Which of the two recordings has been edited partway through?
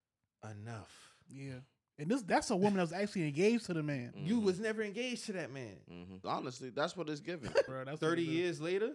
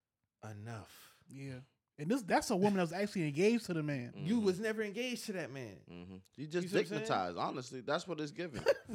first; 2 cuts; at 6.2 s, 7.7 s

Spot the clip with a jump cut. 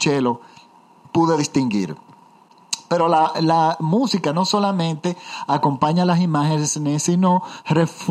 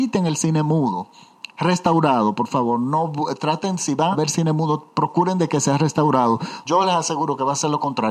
second; 3 cuts; at 1.5 s, 4.1 s, 6.6 s

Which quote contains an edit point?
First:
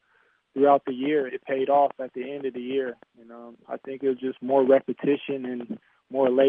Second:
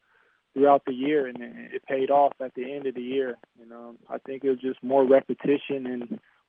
first; 1 cut; at 1.3 s

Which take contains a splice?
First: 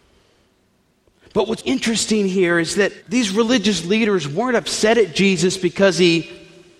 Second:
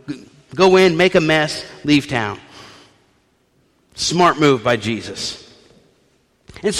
first; 2 cuts; at 1.6 s, 3.0 s

